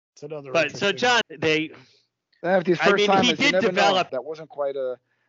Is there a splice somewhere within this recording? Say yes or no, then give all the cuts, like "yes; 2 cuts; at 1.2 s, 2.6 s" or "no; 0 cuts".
yes; 2 cuts; at 1.2 s, 4.1 s